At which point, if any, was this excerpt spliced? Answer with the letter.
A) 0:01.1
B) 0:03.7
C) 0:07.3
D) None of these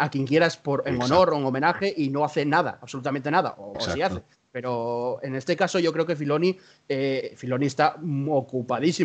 B